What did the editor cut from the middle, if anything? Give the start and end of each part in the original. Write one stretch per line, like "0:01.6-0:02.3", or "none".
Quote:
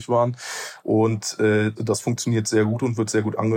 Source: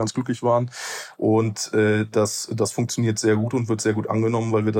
0:02.1-0:02.5